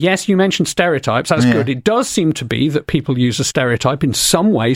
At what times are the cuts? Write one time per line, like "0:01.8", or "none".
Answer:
none